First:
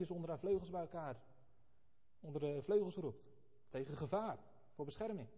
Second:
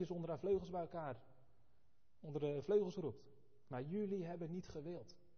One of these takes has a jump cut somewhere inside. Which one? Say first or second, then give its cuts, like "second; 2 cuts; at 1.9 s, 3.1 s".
second; 1 cut; at 3.7 s